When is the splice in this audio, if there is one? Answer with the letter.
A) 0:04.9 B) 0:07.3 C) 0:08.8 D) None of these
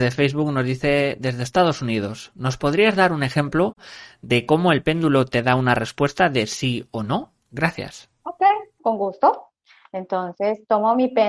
C